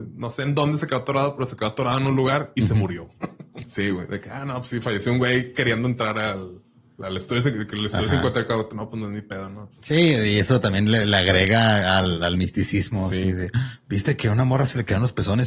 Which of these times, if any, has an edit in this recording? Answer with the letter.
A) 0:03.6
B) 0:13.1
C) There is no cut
A